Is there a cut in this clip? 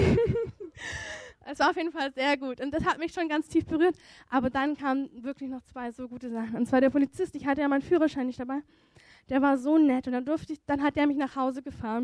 no; 0 cuts

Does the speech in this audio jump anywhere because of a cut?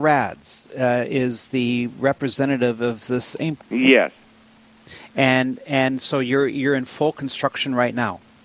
yes; 1 cut; at 3.6 s

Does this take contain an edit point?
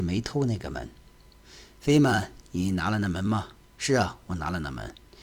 yes; 1 cut; at 1.4 s

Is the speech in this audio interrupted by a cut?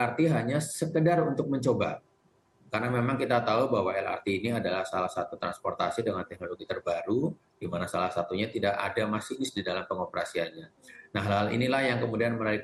no; 0 cuts

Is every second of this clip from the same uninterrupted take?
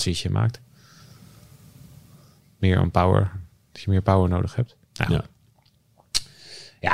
yes; 0 cuts

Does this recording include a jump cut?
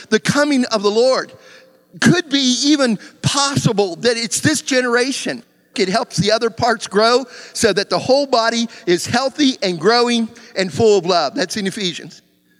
yes; 1 cut; at 5.7 s

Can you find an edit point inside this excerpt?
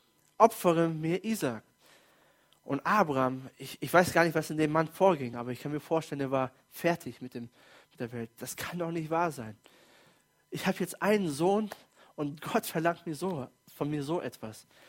no; 0 cuts

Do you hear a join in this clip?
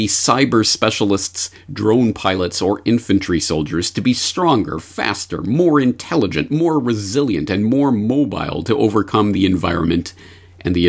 no; 0 cuts

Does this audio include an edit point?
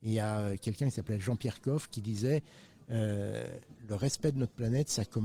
no; 0 cuts

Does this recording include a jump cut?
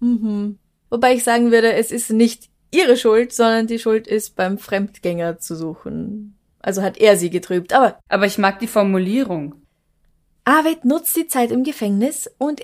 yes; 1 cut; at 8.0 s

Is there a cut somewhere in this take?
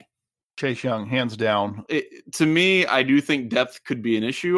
yes; 1 cut; at 1.9 s

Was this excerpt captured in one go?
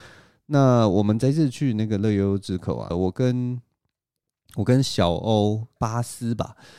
no; 2 cuts; at 2.9 s, 5.8 s

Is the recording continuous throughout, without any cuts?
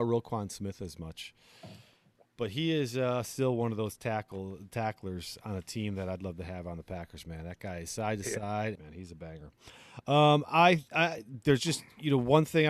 no; 1 cut; at 8.8 s

